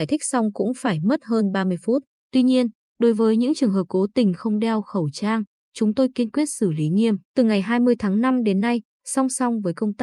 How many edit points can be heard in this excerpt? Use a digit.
2